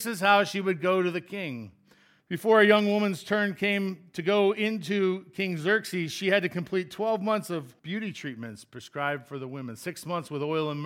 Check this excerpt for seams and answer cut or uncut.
cut